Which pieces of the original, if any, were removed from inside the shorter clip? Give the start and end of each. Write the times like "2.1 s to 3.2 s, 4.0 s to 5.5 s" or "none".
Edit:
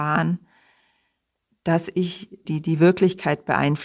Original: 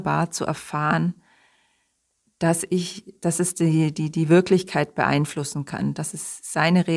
3.2 s to 3.9 s